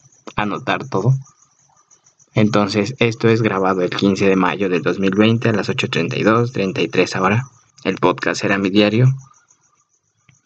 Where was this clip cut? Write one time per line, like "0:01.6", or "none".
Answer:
0:07.7